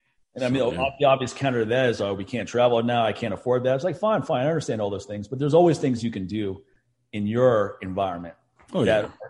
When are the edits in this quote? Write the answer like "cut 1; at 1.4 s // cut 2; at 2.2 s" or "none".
none